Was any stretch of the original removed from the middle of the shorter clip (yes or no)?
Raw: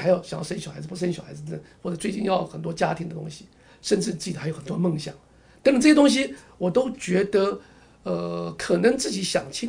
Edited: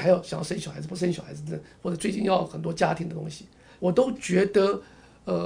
yes